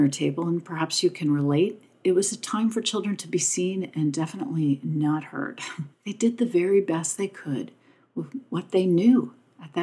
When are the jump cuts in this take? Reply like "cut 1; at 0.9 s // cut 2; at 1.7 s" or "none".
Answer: cut 1; at 5.9 s